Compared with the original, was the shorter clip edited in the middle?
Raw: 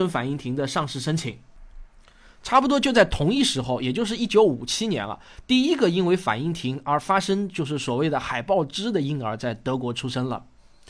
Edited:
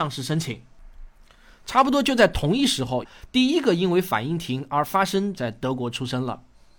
yes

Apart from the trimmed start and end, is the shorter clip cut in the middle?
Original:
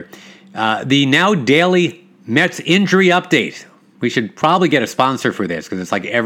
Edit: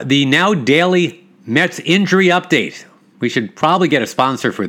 no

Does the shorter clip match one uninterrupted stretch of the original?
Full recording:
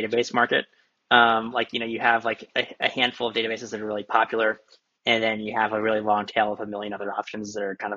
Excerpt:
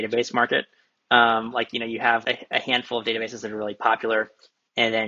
no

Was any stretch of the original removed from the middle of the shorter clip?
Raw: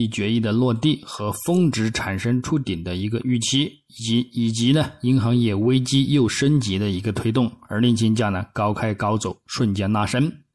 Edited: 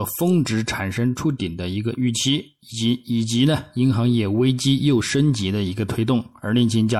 no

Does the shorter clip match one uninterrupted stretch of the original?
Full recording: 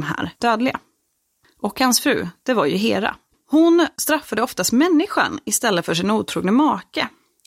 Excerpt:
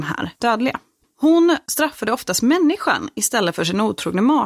no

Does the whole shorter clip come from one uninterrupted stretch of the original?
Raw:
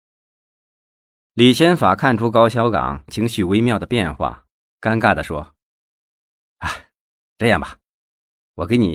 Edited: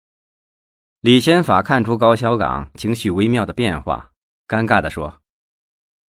yes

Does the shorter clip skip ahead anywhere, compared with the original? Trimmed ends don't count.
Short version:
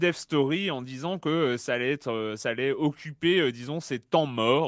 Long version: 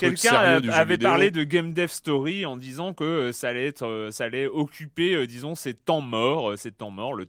no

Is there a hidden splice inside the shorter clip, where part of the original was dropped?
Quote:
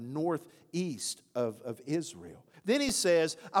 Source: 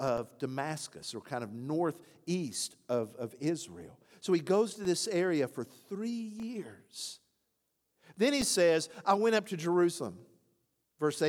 yes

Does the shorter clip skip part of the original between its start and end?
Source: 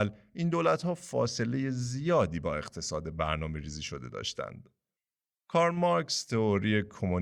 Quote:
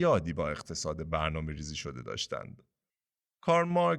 no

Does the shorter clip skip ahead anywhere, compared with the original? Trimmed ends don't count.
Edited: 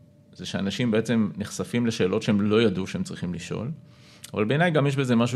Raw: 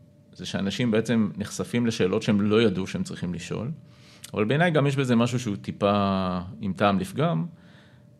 no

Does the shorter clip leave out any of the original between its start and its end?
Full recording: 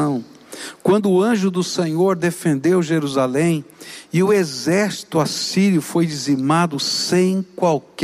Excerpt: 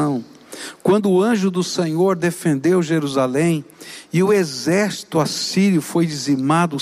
no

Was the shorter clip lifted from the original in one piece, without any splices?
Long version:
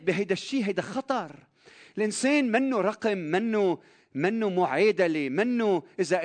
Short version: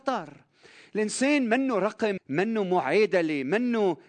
no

